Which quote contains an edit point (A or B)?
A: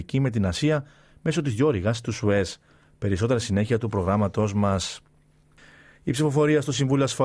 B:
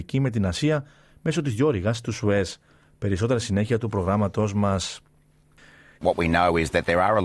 B